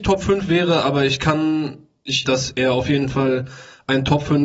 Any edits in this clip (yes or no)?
yes